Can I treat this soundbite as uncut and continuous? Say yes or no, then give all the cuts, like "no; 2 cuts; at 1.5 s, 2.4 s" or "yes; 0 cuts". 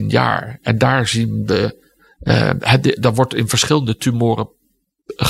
yes; 0 cuts